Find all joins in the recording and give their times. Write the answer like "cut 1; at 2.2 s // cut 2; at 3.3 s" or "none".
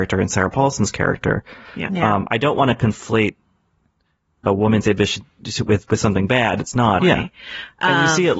cut 1; at 1.9 s // cut 2; at 7.0 s